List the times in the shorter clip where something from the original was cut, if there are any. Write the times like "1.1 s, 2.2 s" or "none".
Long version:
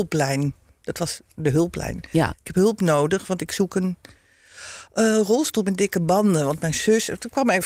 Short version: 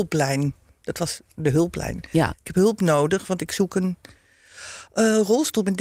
none